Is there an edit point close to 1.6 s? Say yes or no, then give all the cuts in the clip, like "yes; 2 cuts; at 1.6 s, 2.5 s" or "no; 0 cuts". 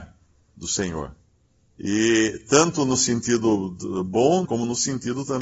no; 1 cut; at 4.5 s